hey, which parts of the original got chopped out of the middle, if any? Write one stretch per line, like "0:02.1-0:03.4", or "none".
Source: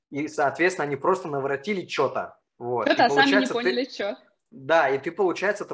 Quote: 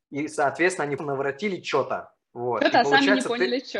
0:01.0-0:01.2